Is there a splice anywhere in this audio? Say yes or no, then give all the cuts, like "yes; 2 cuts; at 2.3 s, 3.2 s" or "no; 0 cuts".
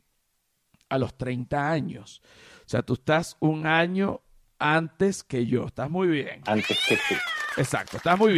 no; 0 cuts